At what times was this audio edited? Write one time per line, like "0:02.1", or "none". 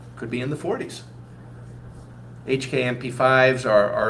none